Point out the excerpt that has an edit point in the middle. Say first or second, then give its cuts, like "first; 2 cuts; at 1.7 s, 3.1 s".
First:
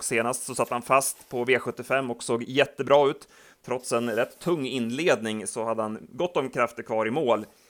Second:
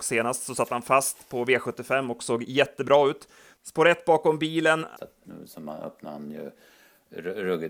second; 2 cuts; at 3.6 s, 5.0 s